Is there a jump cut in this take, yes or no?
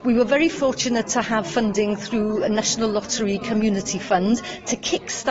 no